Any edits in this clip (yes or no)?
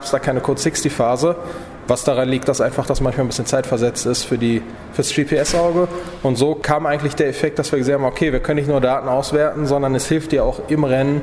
no